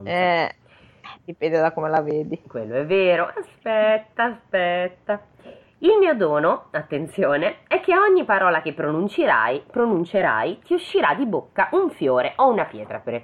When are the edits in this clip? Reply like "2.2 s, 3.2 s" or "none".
none